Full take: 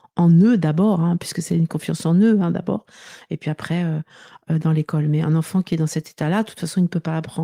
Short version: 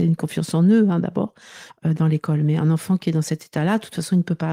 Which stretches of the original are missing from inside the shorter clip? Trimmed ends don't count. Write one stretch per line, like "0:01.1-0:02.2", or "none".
0:03.2-0:04.3